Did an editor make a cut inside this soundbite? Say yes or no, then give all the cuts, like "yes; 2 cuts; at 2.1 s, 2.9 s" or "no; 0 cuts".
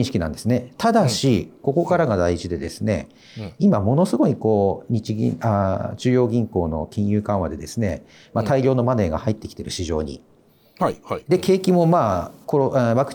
no; 0 cuts